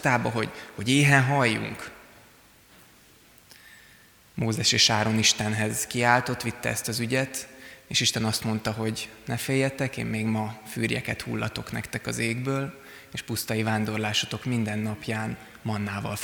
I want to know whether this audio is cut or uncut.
uncut